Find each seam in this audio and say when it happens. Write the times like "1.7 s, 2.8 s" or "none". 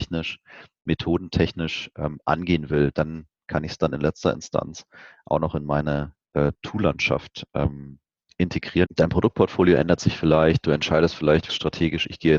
8.9 s, 11.5 s